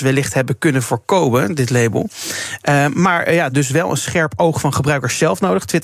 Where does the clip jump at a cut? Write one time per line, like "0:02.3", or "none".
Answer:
0:03.5